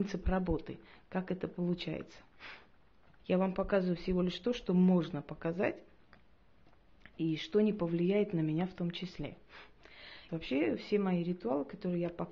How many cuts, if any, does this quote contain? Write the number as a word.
two